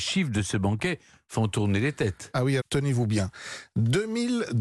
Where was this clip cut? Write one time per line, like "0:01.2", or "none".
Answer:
0:02.6